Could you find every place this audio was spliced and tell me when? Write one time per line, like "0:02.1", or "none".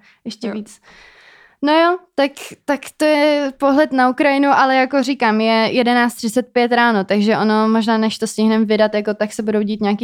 none